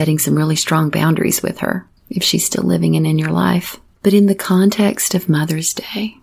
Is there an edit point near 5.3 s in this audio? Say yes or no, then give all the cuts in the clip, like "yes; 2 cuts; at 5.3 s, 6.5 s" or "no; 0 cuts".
no; 2 cuts; at 2.0 s, 3.9 s